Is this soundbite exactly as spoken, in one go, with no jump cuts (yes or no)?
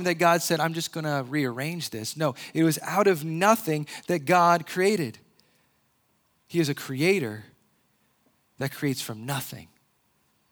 no